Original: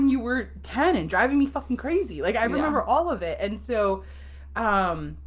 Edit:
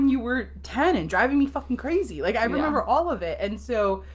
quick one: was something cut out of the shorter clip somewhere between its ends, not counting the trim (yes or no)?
no